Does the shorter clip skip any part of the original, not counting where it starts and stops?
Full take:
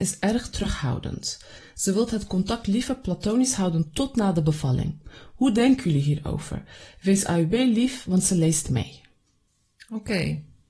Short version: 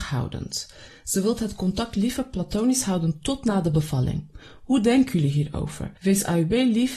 yes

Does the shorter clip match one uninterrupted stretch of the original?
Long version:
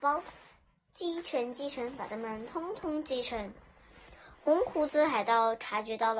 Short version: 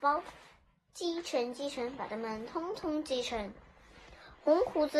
yes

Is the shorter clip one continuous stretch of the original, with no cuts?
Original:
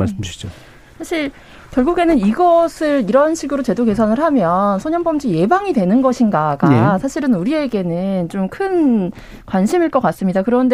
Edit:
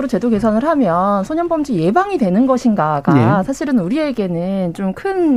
yes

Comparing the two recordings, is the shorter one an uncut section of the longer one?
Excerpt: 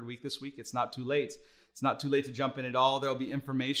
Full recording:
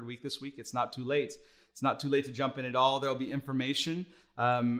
yes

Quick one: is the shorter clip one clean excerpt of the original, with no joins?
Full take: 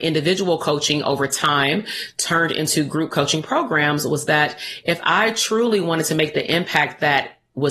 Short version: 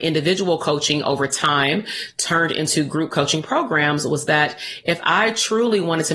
yes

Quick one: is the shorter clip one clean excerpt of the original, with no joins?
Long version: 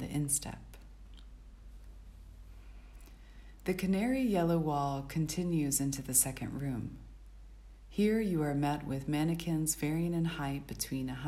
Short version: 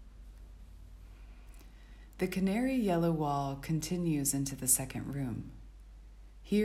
yes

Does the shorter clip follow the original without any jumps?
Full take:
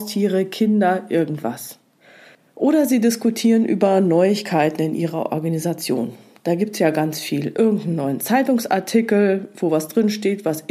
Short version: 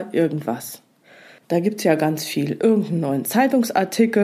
no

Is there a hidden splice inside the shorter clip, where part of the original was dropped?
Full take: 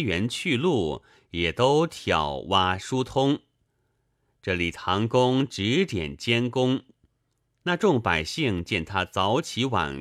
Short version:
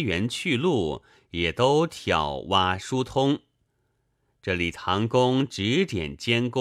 no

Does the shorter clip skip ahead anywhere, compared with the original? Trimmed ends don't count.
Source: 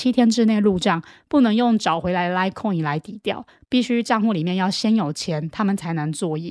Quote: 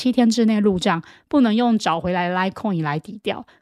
no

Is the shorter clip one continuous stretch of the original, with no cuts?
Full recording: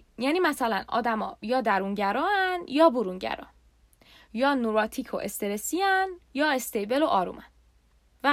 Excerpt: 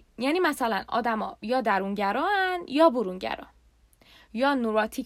yes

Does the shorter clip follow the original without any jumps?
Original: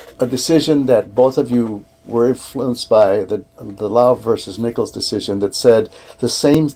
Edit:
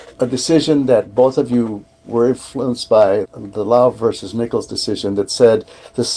no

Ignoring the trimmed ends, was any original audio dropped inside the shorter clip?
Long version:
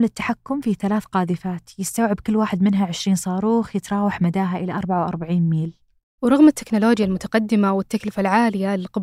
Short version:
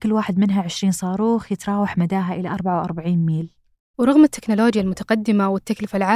no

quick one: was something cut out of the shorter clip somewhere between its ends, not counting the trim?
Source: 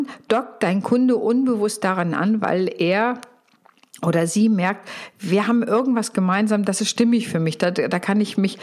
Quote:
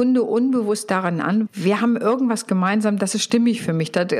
yes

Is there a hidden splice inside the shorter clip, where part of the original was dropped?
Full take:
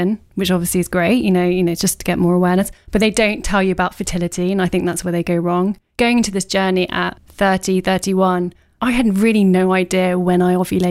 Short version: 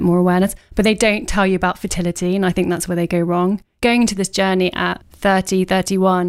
no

